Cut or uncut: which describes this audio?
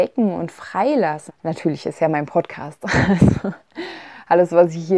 cut